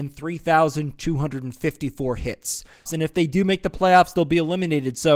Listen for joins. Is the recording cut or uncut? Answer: cut